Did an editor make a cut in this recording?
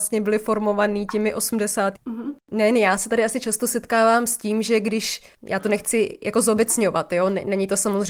yes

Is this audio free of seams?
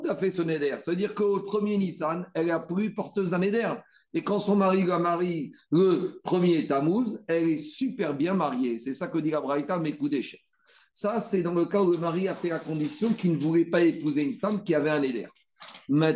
yes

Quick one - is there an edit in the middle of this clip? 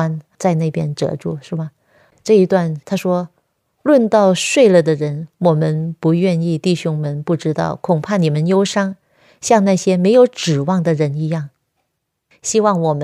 yes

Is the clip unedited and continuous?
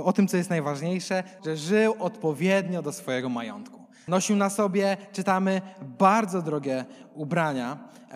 no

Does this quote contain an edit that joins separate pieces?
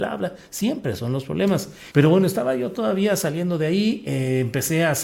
yes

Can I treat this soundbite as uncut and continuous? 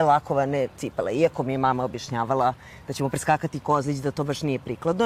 yes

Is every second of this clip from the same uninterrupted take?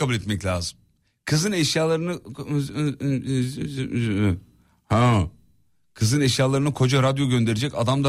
yes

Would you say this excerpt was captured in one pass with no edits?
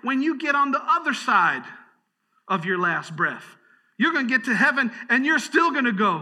yes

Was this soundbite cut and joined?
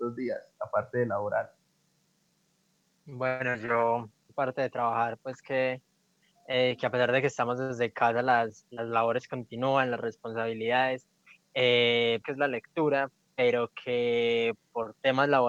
yes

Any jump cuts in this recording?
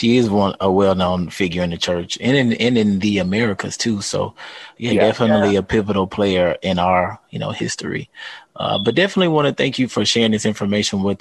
no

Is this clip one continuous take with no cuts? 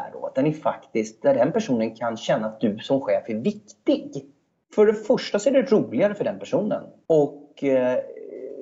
no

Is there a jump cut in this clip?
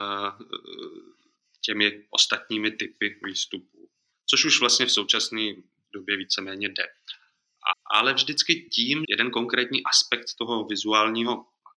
yes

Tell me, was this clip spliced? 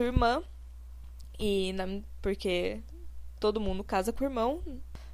yes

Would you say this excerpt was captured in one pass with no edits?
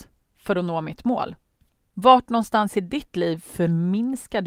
no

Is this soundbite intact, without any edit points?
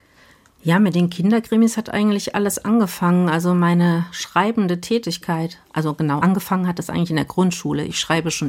yes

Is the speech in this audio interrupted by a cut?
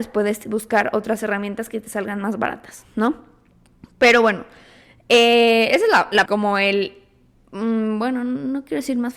yes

